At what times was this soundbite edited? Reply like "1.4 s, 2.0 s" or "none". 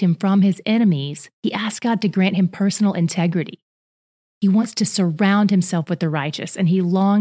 1.3 s